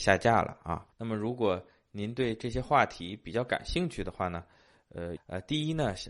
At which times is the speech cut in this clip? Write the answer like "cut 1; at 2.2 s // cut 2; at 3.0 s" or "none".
cut 1; at 0.9 s // cut 2; at 5.2 s